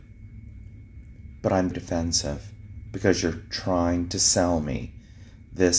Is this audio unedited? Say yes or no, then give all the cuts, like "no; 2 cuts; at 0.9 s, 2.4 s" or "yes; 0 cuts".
no; 1 cut; at 1.7 s